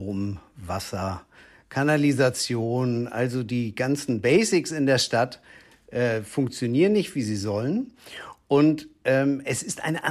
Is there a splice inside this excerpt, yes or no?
no